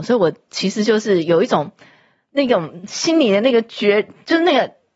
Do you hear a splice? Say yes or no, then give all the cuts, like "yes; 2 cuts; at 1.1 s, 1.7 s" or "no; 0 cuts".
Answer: no; 0 cuts